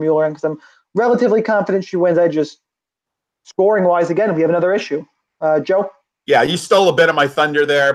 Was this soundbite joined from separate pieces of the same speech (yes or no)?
no